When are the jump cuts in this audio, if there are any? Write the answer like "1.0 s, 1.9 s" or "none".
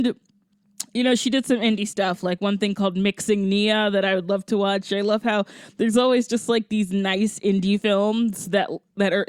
none